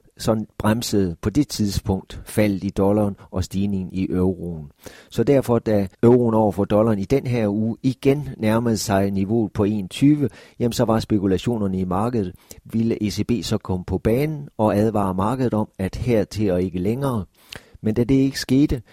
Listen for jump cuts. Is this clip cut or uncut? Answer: cut